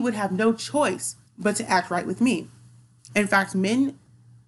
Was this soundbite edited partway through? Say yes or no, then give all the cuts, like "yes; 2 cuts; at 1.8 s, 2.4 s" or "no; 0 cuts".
yes; 2 cuts; at 1.3 s, 3.1 s